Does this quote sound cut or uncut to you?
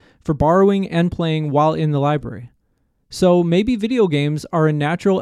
uncut